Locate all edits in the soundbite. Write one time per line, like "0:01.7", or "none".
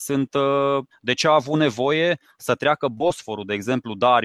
0:00.9

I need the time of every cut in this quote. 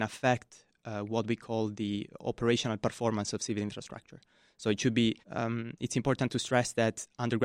0:05.2

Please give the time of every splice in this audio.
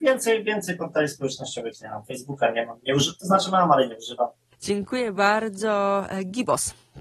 0:04.5

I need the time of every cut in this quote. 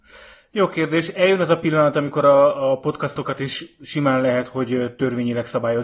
none

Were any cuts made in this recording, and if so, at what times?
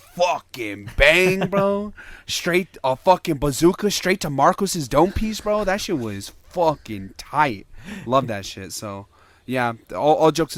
none

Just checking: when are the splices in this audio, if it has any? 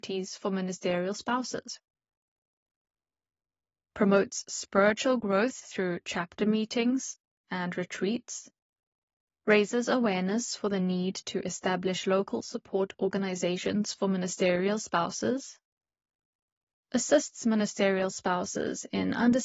0:07.4

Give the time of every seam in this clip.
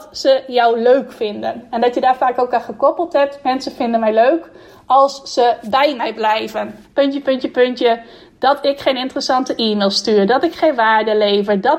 0:06.8

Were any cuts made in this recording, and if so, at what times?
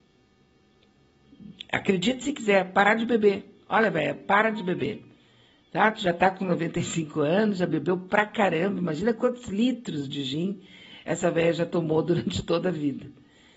none

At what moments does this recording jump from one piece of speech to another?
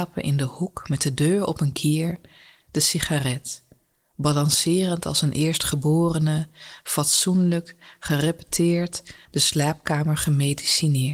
0:09.2

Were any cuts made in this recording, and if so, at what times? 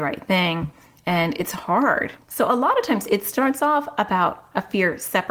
0:02.2

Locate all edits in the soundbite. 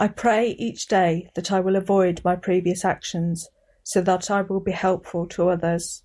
none

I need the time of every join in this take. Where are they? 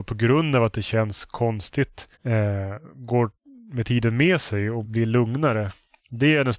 0:02.1
0:04.8

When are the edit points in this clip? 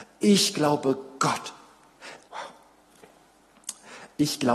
0:02.2

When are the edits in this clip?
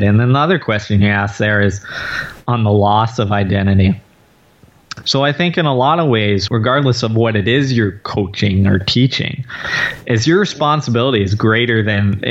0:05.0
0:06.5

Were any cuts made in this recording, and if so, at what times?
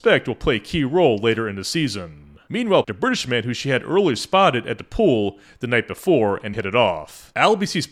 0:02.8
0:06.5

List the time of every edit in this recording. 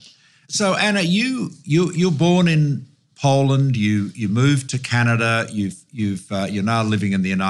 none

